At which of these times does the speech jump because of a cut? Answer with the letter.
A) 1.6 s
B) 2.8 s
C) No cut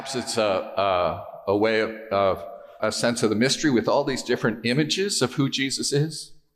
B